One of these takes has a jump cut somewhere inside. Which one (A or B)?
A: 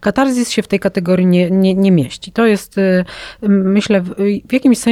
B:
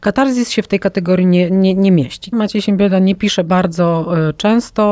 B